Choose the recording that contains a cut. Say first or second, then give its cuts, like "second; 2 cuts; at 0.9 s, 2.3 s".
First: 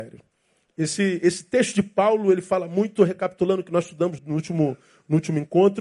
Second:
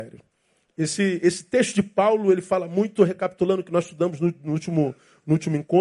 first; 1 cut; at 4.2 s